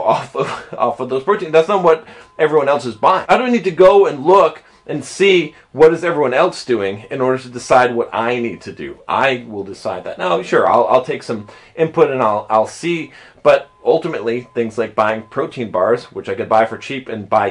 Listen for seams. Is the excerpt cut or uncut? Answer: uncut